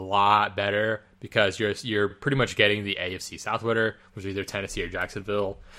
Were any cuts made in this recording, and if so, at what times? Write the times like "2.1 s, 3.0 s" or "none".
none